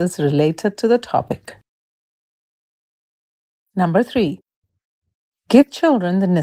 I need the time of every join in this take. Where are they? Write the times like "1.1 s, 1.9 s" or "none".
none